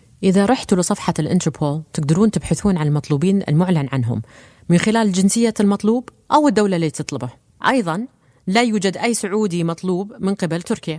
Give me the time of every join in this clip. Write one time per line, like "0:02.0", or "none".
0:07.6